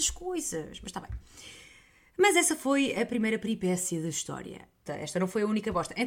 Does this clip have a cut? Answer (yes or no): yes